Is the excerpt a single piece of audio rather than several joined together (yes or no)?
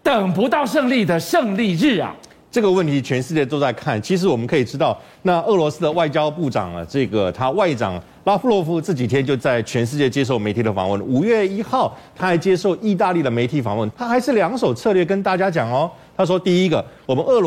no